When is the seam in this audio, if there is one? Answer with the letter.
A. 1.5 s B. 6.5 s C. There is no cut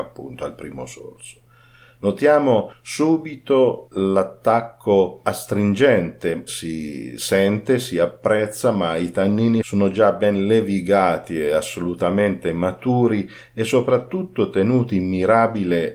B